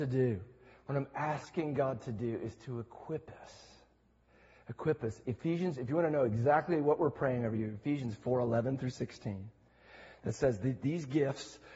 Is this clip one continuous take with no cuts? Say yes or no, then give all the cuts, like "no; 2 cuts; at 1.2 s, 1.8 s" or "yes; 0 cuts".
yes; 0 cuts